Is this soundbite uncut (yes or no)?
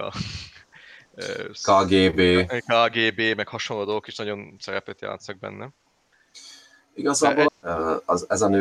no